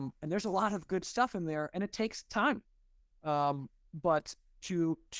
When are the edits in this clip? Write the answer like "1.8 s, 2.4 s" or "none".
none